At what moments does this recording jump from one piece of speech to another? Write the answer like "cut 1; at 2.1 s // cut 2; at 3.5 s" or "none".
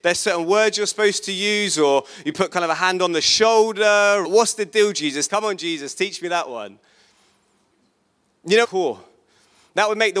cut 1; at 4.2 s // cut 2; at 5.3 s // cut 3; at 8.6 s